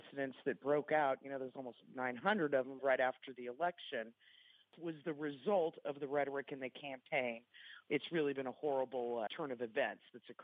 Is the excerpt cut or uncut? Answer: cut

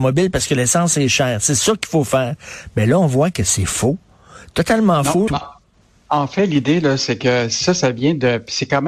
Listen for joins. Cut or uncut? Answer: cut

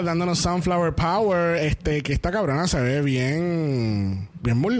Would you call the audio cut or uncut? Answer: uncut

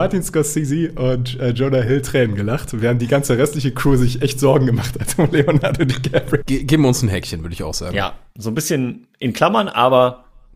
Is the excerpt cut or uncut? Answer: cut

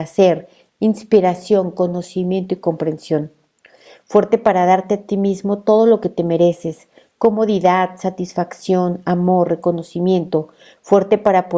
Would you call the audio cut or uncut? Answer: uncut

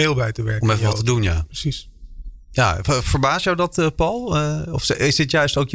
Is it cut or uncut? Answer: uncut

